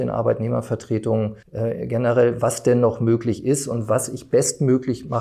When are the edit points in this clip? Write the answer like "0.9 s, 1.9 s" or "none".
1.4 s